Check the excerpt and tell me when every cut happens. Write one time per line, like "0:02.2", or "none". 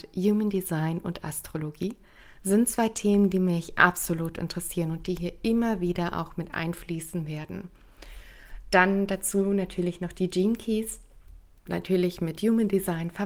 0:11.7